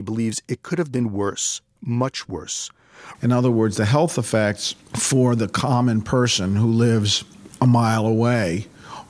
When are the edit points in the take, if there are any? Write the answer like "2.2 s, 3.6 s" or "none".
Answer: 3.1 s